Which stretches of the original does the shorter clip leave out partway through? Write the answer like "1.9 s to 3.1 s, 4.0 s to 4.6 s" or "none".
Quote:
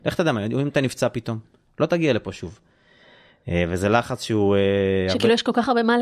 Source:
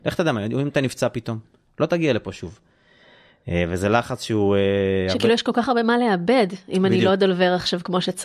none